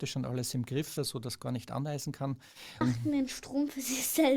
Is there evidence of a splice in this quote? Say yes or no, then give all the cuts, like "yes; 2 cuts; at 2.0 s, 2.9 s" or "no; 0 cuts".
yes; 2 cuts; at 1.0 s, 2.8 s